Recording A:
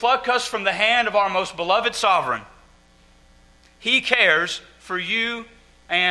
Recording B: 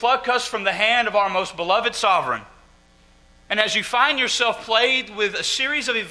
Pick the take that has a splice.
B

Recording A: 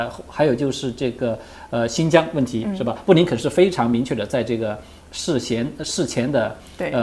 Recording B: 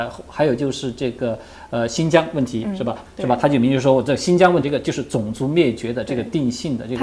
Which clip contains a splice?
B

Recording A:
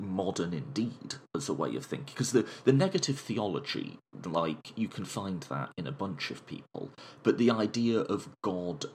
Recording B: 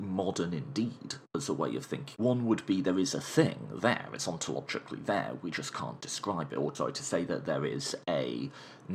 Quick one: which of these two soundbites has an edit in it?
B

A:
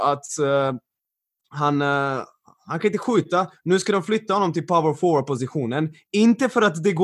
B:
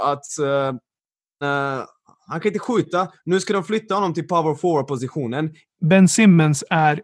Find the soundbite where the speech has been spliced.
B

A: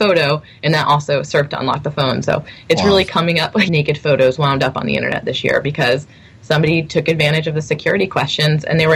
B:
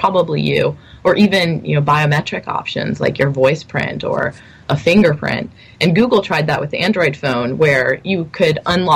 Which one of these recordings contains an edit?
A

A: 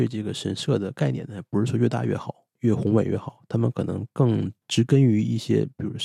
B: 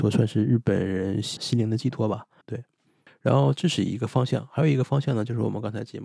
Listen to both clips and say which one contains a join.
B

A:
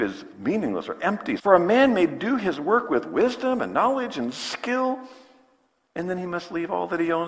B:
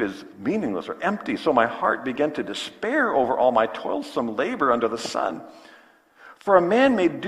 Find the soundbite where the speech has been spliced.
A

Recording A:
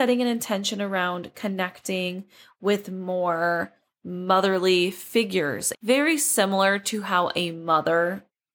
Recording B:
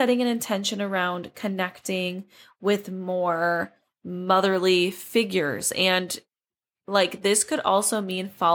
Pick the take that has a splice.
A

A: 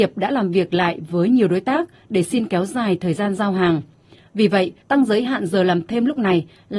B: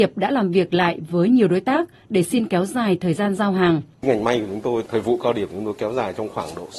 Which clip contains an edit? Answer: B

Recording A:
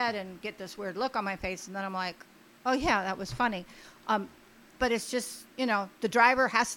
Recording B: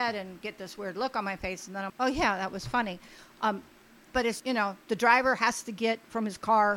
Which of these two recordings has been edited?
B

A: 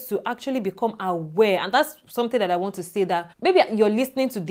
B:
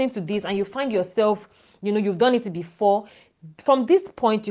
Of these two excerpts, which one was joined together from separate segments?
A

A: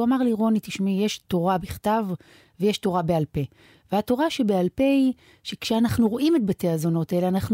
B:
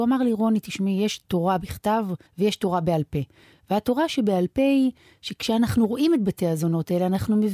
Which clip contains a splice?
B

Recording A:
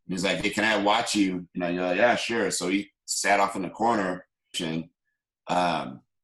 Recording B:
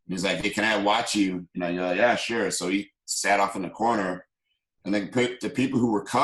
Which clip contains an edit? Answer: A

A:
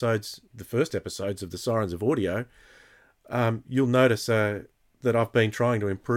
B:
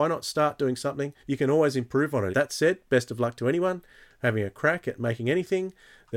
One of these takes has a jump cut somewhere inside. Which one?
B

